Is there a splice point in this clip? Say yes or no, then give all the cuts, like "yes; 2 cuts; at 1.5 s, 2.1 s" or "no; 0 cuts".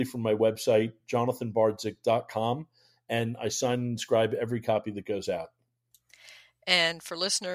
no; 0 cuts